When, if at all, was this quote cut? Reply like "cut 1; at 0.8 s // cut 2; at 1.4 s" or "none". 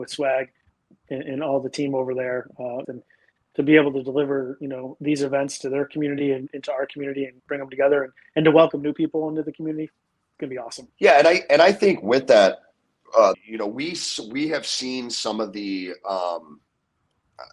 cut 1; at 2.8 s // cut 2; at 10.9 s // cut 3; at 13.3 s